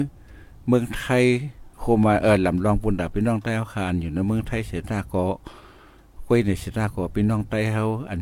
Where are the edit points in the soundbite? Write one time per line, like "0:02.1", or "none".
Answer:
0:01.7